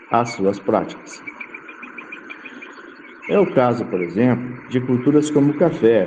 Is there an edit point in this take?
yes; 1 cut; at 3.2 s

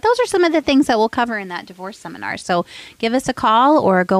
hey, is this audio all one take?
yes; 0 cuts

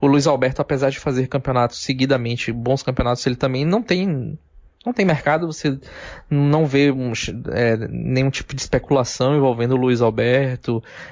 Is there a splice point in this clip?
no; 0 cuts

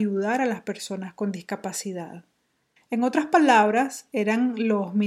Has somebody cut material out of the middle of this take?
yes; 1 cut; at 2.8 s

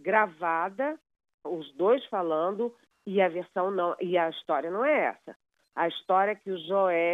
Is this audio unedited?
no; 1 cut; at 1.4 s

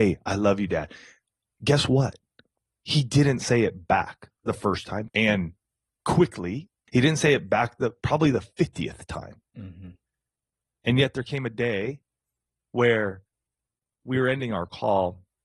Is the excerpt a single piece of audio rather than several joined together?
no; 2 cuts; at 5.1 s, 6.9 s

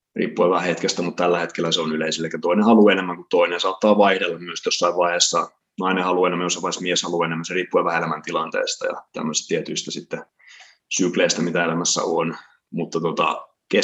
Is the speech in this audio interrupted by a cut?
no; 0 cuts

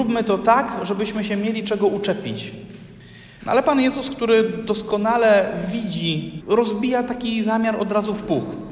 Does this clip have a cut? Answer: yes; 2 cuts; at 3.4 s, 6.4 s

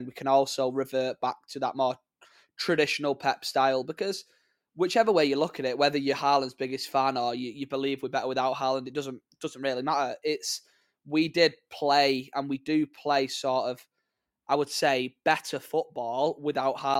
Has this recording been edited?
no; 0 cuts

